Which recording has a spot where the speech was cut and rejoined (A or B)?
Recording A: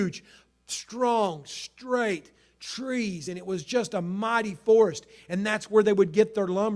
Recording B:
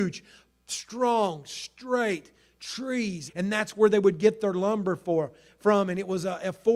B